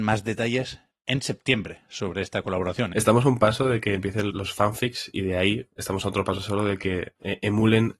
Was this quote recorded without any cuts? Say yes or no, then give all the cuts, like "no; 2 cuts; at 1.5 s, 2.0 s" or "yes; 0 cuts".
no; 2 cuts; at 2.9 s, 4.3 s